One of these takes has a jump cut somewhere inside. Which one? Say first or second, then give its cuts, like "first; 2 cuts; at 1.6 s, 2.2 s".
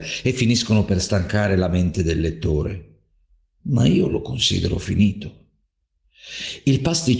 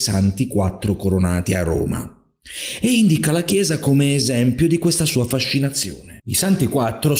second; 1 cut; at 6.2 s